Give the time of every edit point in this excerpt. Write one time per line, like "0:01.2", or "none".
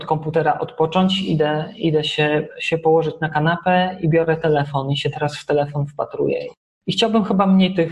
none